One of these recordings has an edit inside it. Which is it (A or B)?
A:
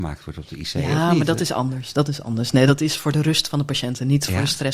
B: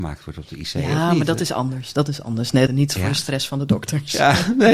B